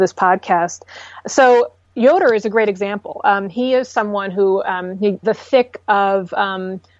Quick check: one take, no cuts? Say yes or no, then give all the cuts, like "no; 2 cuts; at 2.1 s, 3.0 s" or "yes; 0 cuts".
no; 2 cuts; at 1.8 s, 5.2 s